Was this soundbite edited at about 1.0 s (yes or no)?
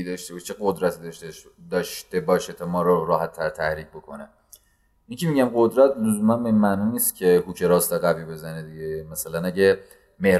no